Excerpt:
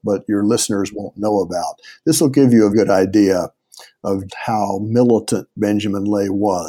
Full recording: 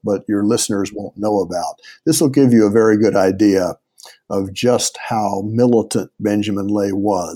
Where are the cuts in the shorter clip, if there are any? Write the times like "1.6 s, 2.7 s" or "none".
2.7 s, 4.3 s